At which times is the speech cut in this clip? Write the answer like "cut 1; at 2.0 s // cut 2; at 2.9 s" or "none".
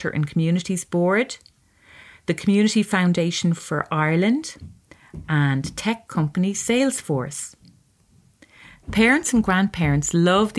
cut 1; at 8.8 s